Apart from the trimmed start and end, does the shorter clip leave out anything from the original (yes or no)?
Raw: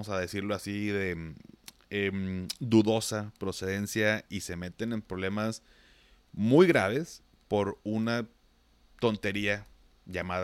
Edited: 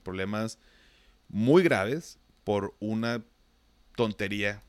no